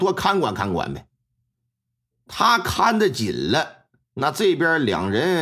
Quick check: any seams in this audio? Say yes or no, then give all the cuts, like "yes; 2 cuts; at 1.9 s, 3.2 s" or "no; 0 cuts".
no; 0 cuts